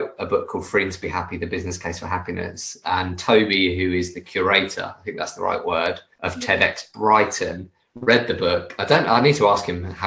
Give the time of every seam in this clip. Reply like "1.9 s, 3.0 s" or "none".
none